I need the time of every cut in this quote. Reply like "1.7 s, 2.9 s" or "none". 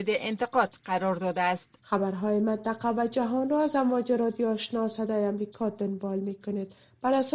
1.8 s